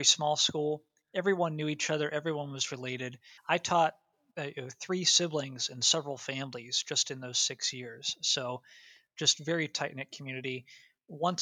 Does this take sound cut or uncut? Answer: cut